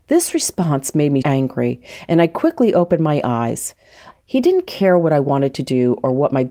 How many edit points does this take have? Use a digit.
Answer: 1